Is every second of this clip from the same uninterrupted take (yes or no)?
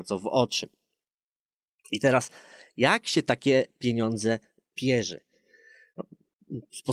yes